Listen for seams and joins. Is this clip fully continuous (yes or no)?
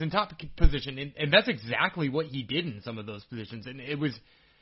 yes